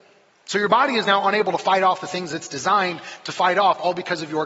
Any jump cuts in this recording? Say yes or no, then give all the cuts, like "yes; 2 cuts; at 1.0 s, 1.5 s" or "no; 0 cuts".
no; 0 cuts